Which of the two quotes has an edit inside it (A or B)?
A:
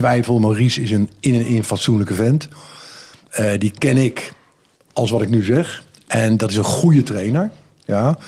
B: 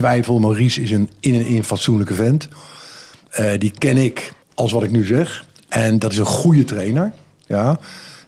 B